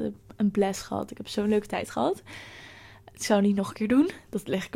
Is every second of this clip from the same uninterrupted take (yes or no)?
yes